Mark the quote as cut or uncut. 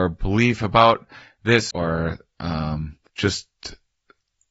cut